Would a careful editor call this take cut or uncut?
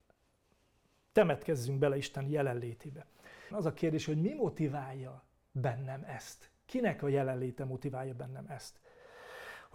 cut